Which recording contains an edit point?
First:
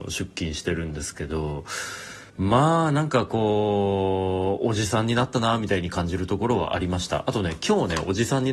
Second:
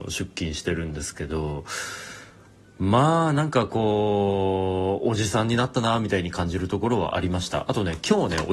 first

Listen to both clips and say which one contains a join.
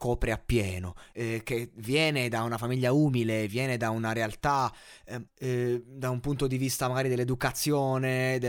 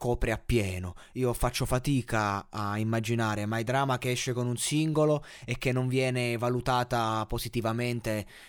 first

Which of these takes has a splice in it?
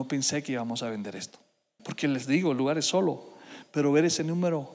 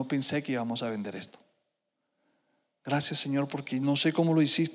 first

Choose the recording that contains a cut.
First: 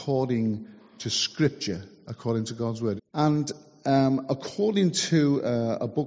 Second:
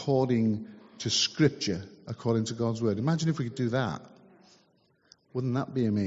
first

